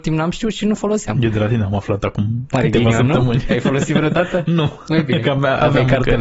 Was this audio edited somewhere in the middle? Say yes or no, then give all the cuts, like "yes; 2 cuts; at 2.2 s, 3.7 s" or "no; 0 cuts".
no; 0 cuts